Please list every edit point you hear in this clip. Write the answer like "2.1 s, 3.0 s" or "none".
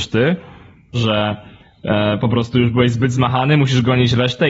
0.9 s